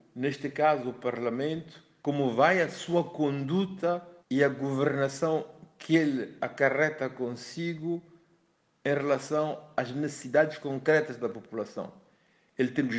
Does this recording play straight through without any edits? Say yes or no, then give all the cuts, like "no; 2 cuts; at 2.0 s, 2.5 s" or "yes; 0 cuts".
no; 2 cuts; at 2.0 s, 4.2 s